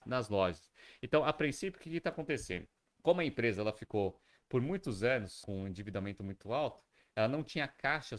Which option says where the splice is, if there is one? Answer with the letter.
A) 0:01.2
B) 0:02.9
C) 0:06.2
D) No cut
D